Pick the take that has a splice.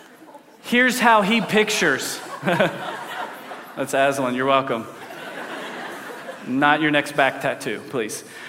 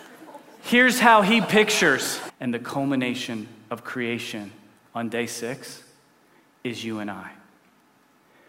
second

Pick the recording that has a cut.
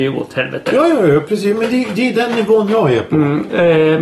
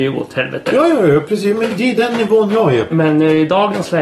second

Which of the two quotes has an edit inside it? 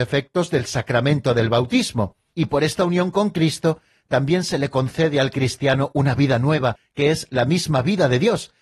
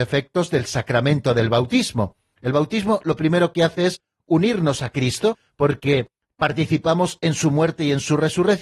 first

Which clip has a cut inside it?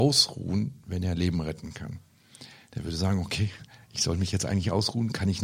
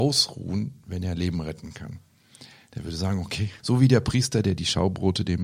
second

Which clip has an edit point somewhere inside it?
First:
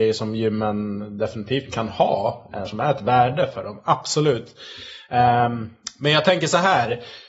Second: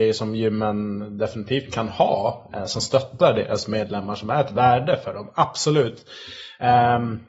first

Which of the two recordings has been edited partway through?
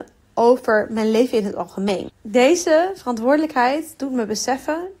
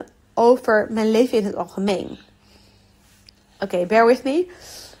first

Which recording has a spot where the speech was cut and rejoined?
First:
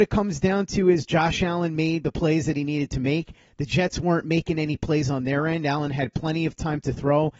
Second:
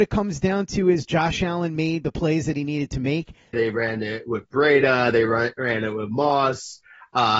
second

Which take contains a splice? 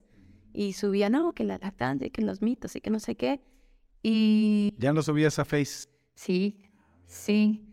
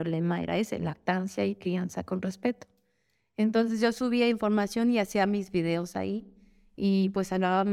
first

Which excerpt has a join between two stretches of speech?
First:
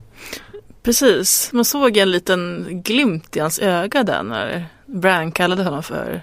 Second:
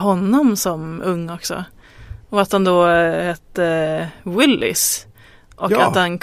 first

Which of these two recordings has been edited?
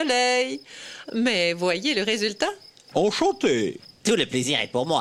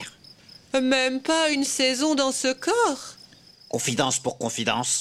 first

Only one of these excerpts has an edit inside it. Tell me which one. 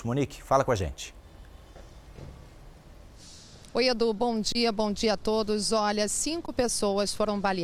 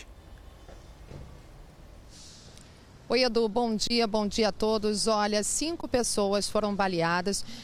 first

